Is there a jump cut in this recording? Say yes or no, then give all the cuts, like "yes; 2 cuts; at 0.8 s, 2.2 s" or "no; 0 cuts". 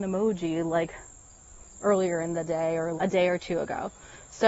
yes; 2 cuts; at 1.7 s, 3.0 s